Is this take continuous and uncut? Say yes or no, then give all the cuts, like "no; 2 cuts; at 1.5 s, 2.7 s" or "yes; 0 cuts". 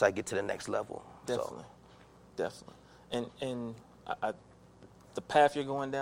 yes; 0 cuts